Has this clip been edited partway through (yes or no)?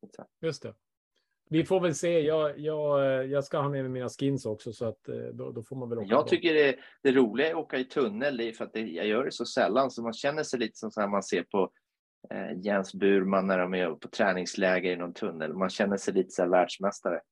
yes